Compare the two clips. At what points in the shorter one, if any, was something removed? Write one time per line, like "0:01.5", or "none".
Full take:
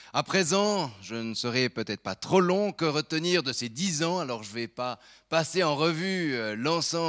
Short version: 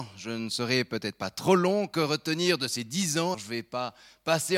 0:03.3